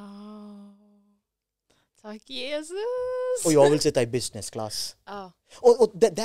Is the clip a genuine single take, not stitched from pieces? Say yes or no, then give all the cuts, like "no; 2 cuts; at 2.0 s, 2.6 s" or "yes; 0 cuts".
yes; 0 cuts